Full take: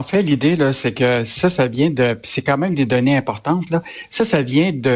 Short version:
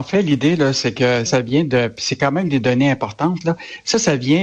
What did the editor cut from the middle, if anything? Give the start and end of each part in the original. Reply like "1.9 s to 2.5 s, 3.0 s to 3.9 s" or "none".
1.3 s to 1.5 s